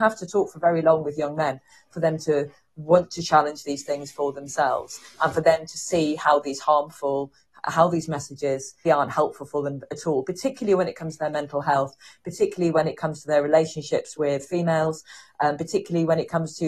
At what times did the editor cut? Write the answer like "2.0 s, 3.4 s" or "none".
8.9 s